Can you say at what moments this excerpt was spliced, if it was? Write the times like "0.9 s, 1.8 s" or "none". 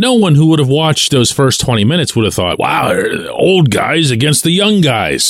none